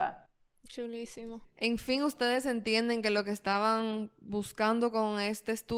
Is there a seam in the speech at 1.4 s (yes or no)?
yes